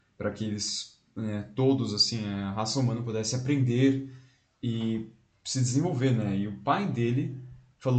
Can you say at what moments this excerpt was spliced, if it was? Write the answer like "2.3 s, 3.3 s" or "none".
none